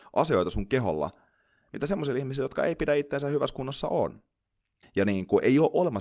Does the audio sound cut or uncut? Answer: cut